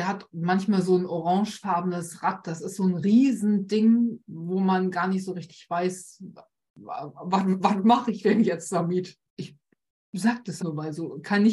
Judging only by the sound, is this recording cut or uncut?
cut